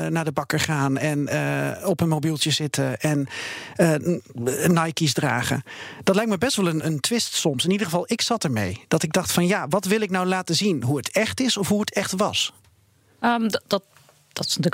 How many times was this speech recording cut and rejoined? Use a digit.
1